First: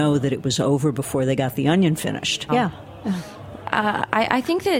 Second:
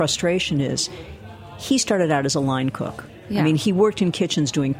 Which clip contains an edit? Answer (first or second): first